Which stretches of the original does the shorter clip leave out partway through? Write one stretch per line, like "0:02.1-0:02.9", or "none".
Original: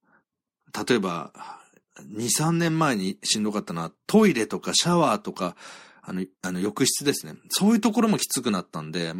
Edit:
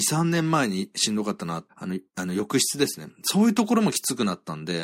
0:04.0-0:06.0

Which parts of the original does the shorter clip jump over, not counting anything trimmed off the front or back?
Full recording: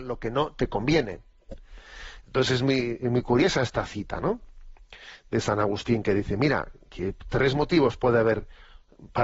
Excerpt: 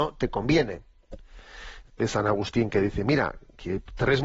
0:02.3-0:05.2

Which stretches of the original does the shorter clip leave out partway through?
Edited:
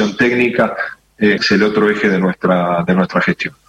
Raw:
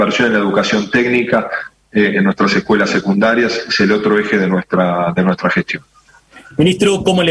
0:02.1-0:03.7

